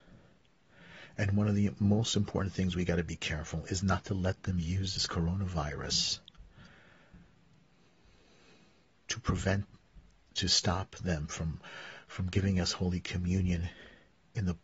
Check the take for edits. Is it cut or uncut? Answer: uncut